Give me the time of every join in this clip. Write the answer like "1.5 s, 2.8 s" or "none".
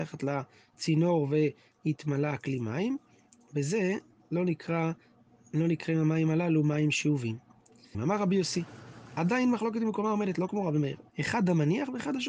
7.9 s, 11.1 s

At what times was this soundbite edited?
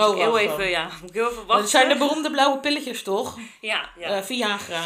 none

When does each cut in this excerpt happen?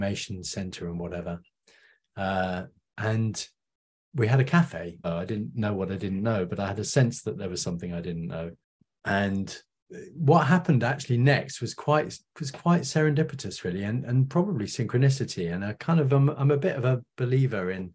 5.0 s

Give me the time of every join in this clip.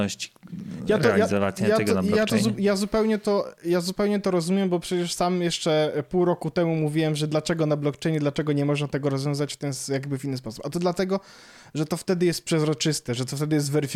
none

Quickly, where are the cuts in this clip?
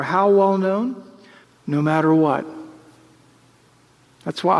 1.4 s

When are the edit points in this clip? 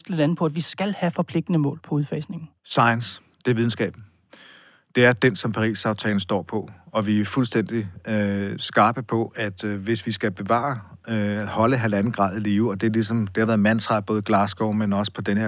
2.6 s

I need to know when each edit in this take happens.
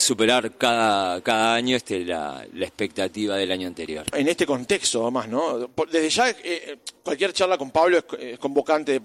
4.1 s

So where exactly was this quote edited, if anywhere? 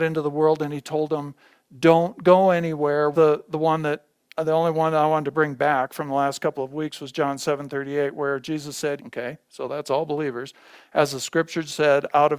3.1 s, 9.0 s

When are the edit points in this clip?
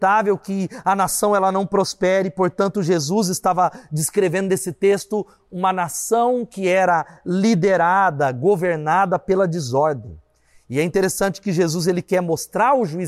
none

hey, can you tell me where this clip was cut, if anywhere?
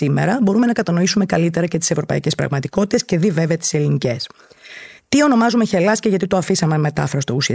5.0 s

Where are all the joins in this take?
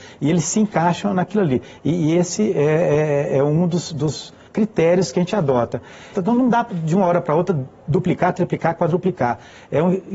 4.5 s, 6.1 s

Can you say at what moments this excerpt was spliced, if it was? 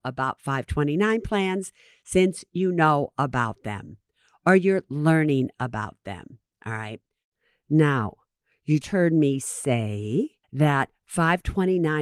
8.8 s, 10.4 s

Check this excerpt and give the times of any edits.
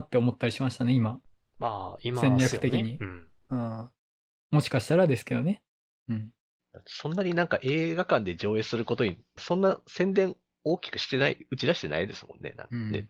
none

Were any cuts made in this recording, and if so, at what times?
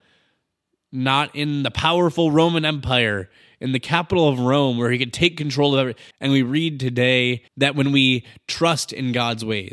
6.1 s, 7.5 s

